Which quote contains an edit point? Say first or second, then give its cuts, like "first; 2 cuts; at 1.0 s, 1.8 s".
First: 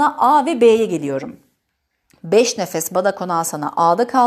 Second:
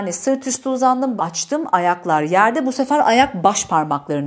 second; 1 cut; at 1.2 s